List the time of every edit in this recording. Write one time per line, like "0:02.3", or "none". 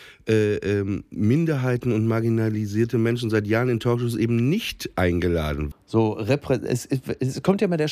0:05.7